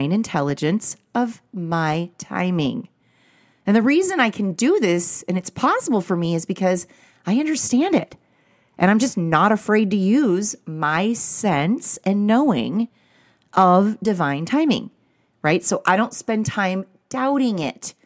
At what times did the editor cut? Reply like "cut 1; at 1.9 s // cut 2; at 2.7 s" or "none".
none